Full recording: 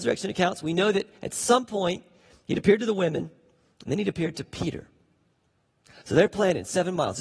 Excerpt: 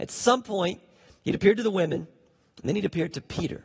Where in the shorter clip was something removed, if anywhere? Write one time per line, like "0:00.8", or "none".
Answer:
none